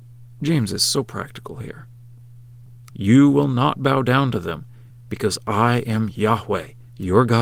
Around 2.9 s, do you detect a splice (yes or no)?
yes